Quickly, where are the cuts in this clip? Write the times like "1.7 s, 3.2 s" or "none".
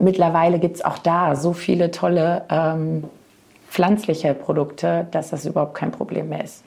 none

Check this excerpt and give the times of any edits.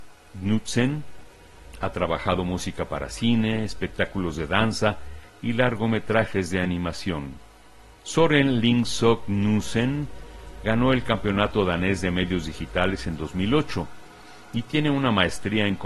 none

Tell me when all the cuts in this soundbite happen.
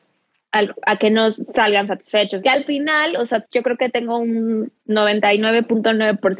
2.4 s, 3.4 s, 4.8 s

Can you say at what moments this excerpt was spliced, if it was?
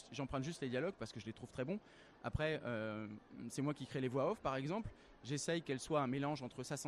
none

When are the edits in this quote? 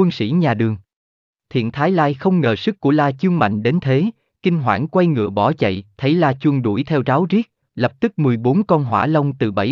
1.3 s, 7.6 s

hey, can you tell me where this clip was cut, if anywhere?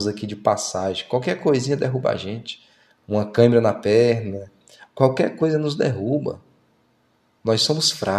3.0 s

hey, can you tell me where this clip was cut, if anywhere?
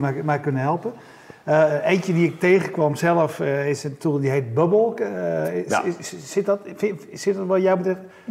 none

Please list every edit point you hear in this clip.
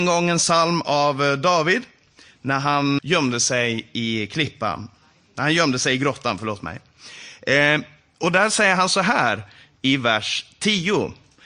3.0 s

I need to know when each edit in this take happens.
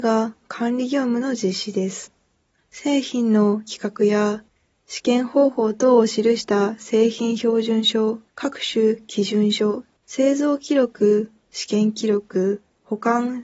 2.6 s, 8.3 s, 10.0 s

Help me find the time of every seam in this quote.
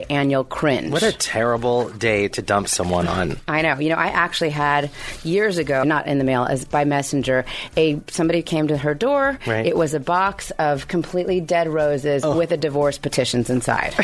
5.8 s

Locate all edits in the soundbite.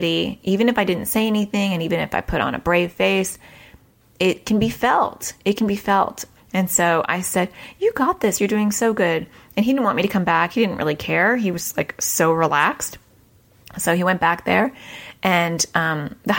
6.4 s

